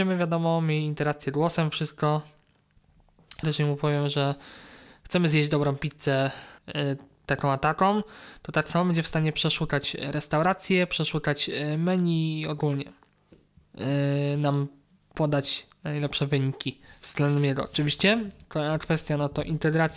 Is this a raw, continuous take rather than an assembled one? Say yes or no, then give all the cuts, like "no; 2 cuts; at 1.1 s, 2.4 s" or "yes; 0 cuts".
no; 2 cuts; at 3.4 s, 6.6 s